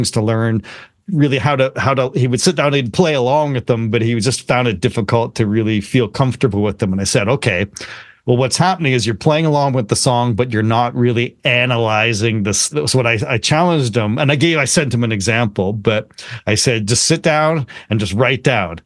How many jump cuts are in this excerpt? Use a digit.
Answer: 1